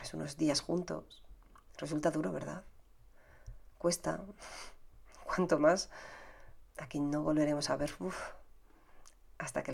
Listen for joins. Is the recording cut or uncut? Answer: cut